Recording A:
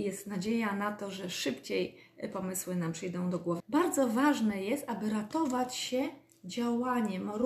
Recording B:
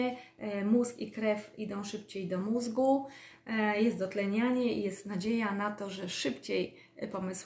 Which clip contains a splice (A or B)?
A